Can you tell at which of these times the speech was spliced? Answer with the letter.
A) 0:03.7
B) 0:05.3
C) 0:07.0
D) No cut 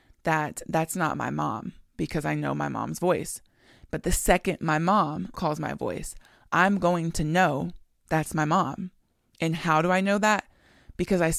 B